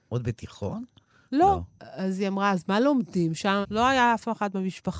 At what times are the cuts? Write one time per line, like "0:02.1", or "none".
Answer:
0:01.8
0:03.6